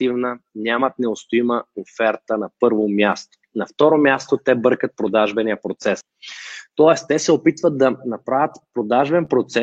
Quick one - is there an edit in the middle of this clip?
no; 0 cuts

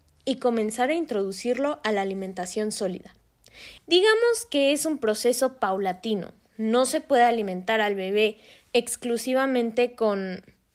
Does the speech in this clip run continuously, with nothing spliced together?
no; 1 cut; at 3.8 s

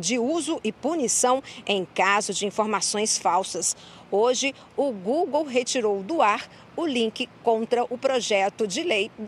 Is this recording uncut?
yes; 0 cuts

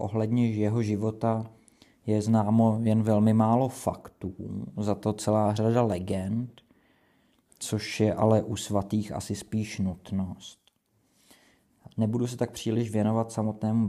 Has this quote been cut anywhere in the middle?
no; 0 cuts

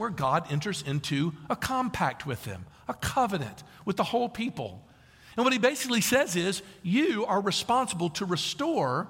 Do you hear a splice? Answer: no; 0 cuts

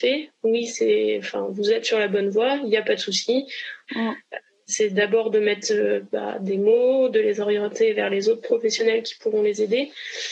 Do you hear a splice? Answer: yes; 1 cut; at 3.9 s

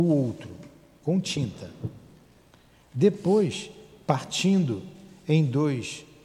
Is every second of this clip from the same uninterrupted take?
yes; 0 cuts

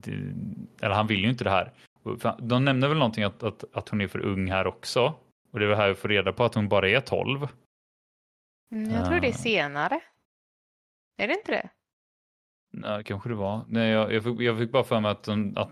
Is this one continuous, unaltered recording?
yes; 0 cuts

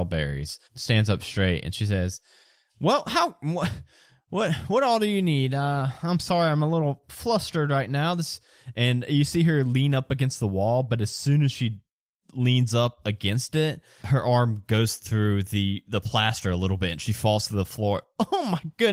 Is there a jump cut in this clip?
no; 0 cuts

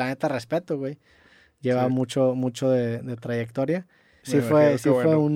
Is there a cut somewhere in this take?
yes; 1 cut; at 4.2 s

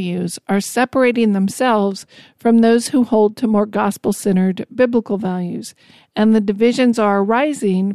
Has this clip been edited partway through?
no; 0 cuts

